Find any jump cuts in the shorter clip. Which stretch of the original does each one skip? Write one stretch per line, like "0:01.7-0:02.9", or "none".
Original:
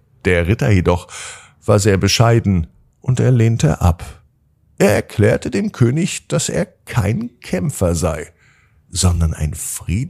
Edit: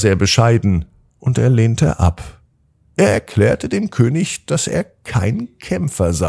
none